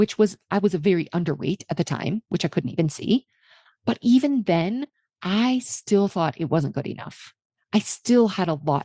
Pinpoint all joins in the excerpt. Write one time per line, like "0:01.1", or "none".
none